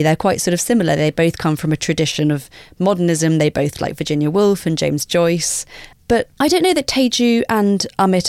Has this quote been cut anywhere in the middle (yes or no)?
yes